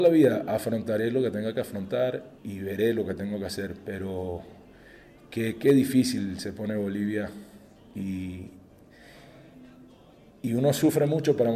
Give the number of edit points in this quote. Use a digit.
1